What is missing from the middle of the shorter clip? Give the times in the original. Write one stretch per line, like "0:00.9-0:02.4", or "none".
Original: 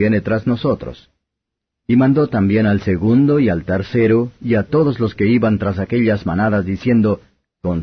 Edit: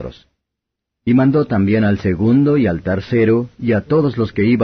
none